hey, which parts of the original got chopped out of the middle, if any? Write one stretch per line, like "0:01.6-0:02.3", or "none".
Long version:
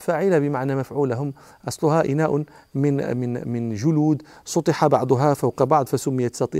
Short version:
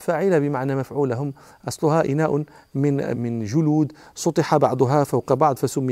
0:03.1-0:03.4